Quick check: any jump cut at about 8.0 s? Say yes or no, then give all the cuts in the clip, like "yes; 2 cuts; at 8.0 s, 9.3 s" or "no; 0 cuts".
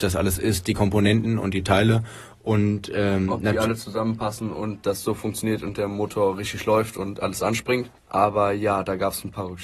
yes; 1 cut; at 8.0 s